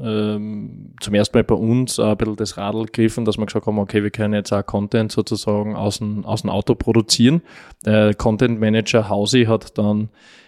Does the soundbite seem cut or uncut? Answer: uncut